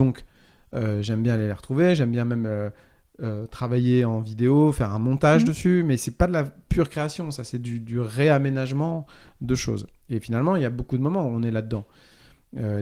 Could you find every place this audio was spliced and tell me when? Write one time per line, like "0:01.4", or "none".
none